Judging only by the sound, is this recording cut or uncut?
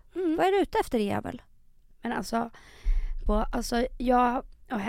cut